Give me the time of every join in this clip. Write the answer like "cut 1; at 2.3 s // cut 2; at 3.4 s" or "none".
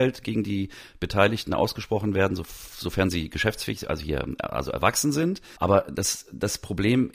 cut 1; at 5.6 s